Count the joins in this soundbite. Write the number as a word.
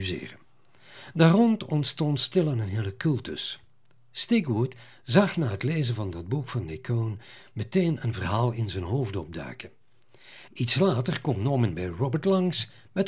one